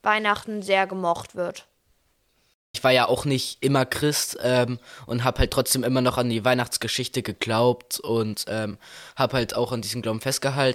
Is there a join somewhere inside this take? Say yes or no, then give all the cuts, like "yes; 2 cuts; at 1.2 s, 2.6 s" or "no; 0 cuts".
yes; 1 cut; at 2.7 s